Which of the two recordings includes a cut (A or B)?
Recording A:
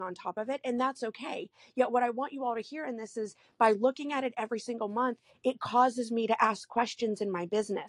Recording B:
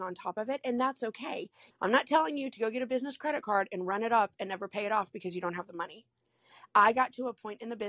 B